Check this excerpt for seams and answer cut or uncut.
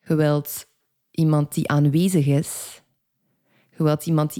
uncut